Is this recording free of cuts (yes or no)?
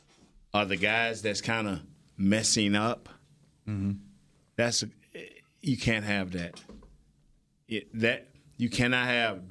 yes